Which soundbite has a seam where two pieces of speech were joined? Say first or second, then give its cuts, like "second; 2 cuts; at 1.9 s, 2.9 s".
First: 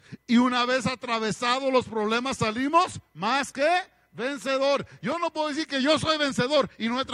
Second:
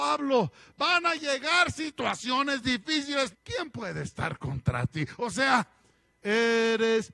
second; 1 cut; at 3.3 s